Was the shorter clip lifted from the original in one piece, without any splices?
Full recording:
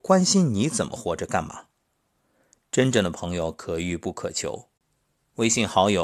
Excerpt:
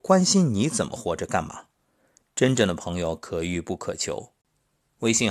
no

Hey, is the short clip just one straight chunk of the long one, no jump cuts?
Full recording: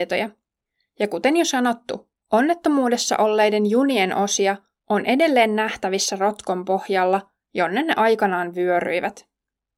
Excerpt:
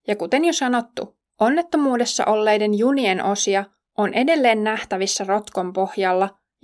yes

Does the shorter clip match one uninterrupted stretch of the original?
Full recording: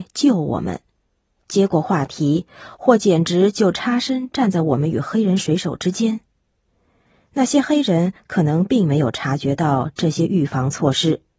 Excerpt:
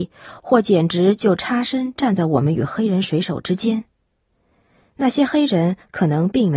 yes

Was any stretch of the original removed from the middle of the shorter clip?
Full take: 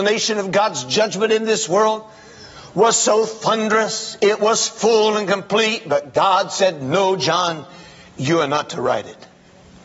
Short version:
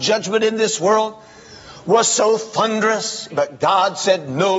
yes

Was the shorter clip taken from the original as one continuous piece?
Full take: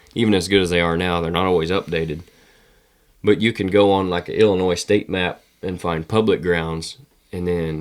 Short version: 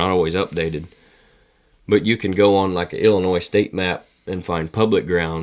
yes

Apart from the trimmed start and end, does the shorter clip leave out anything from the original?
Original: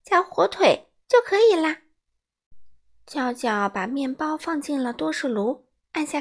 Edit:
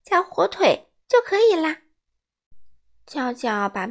no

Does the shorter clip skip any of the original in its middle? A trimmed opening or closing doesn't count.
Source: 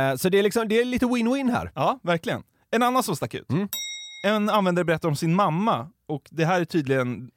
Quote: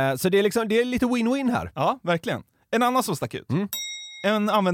no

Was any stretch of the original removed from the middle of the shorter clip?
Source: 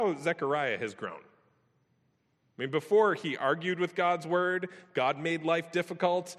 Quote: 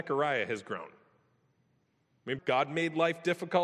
yes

